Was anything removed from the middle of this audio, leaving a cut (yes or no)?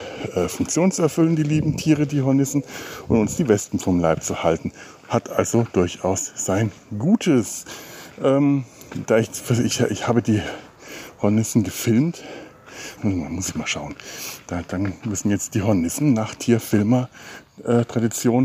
yes